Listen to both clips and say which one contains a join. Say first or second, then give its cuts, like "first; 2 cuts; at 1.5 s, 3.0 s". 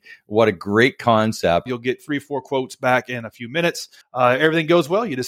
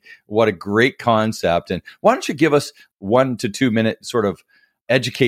first; 2 cuts; at 1.7 s, 4.0 s